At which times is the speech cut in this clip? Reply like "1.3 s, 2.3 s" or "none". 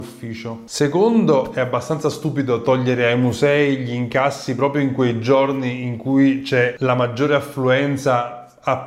none